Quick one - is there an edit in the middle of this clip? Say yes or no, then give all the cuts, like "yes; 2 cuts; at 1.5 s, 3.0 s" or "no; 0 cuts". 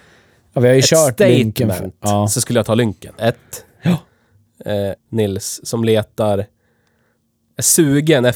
yes; 2 cuts; at 3.2 s, 5.0 s